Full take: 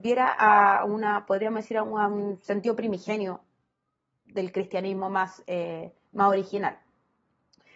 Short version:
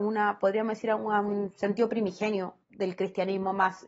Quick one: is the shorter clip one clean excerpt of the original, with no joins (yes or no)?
no